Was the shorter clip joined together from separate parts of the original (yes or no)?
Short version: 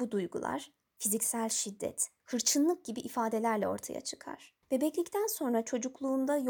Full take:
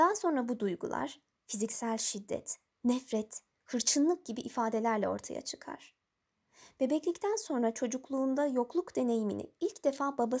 yes